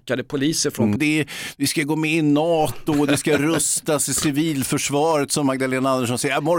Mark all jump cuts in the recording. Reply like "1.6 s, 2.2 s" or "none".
1.0 s